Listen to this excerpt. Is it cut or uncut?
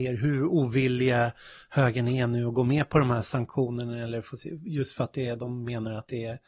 uncut